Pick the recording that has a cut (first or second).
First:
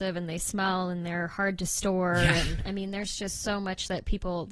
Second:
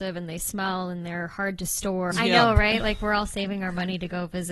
second